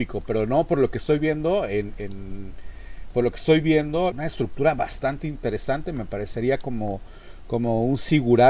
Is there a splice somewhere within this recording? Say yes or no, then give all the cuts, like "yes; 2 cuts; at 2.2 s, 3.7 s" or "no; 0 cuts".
yes; 1 cut; at 4.1 s